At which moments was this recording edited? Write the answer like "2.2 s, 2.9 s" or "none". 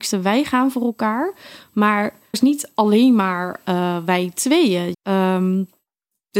2.3 s, 4.9 s